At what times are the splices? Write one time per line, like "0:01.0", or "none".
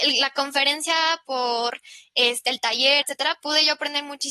0:03.0